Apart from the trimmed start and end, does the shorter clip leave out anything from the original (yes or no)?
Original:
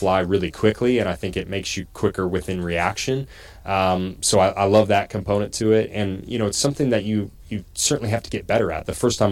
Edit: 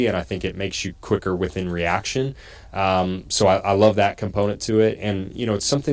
no